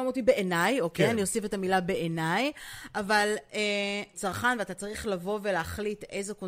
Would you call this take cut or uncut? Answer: cut